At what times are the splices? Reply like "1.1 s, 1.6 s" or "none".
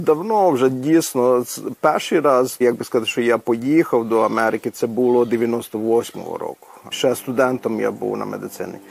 2.6 s, 6.9 s

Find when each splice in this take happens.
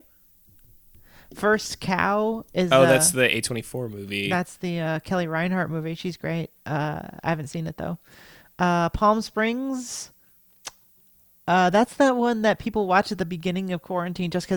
none

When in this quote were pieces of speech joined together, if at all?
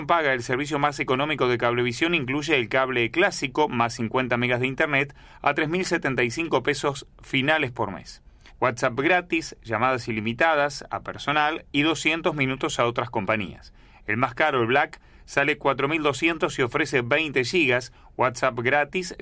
8.5 s

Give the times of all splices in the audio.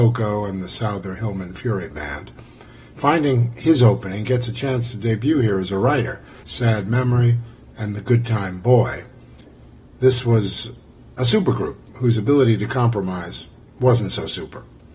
6.4 s

